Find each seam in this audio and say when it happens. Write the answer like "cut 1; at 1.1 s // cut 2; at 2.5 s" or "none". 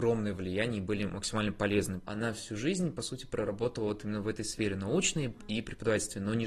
cut 1; at 2.1 s